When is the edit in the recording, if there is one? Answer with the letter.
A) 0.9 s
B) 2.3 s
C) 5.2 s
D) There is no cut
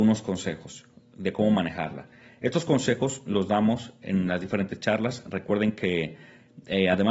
D